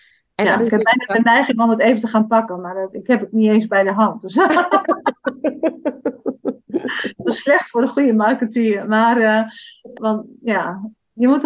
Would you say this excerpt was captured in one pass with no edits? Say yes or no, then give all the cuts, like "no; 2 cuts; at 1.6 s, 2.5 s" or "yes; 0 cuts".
no; 1 cut; at 10.0 s